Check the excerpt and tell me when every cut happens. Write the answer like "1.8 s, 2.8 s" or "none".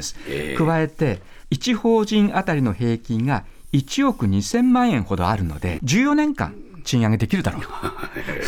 1.4 s, 5.8 s